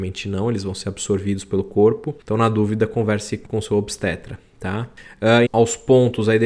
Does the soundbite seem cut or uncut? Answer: cut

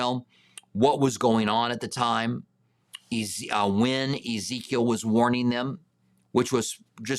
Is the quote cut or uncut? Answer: uncut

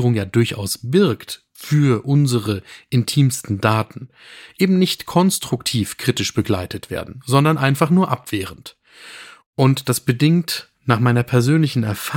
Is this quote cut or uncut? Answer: uncut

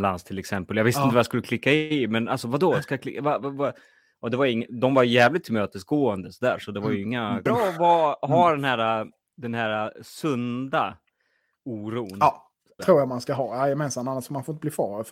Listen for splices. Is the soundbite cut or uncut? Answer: cut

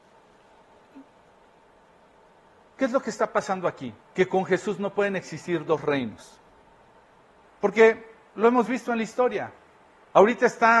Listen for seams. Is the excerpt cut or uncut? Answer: cut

